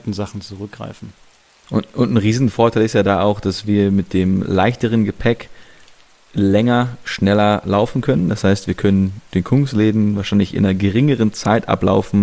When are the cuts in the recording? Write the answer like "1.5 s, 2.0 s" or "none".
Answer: none